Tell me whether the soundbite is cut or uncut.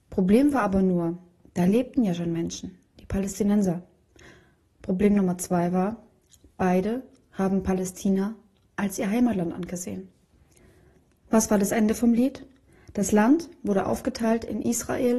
uncut